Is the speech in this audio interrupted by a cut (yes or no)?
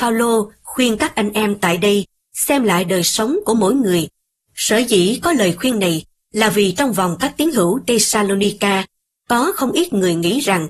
yes